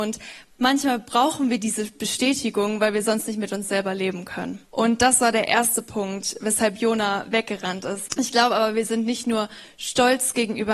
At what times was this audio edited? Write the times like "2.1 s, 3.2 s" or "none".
4.6 s, 8.1 s